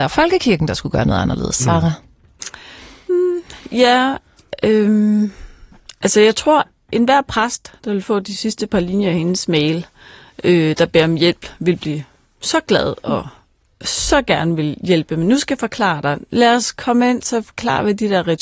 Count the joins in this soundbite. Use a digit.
0